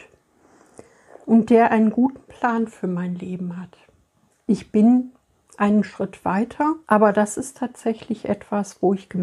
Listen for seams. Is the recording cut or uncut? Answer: cut